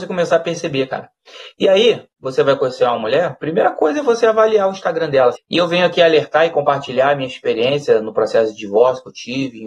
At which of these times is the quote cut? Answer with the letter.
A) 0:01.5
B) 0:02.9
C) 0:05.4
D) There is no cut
C